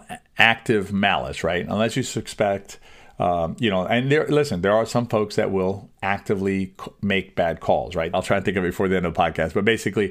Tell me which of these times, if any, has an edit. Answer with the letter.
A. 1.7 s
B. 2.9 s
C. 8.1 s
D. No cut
C